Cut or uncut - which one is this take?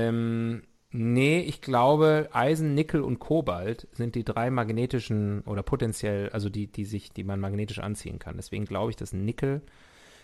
cut